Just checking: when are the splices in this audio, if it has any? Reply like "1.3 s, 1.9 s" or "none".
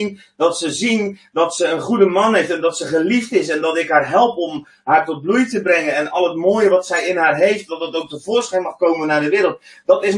none